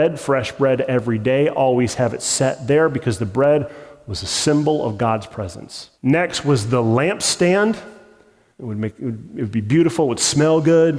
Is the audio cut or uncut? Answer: cut